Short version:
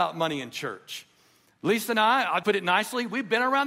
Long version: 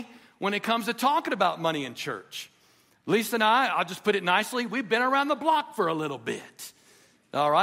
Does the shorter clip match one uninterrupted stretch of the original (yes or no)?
no